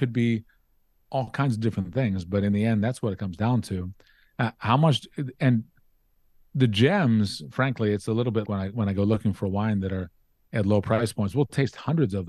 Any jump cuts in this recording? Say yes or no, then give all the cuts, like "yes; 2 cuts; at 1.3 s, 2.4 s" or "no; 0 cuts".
yes; 1 cut; at 8.4 s